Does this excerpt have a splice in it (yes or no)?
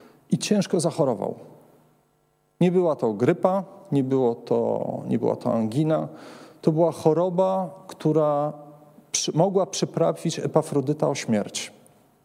no